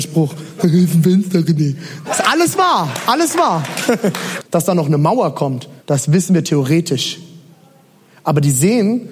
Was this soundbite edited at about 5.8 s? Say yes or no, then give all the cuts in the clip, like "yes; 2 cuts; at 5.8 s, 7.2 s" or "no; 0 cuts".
yes; 3 cuts; at 2.0 s, 4.4 s, 5.8 s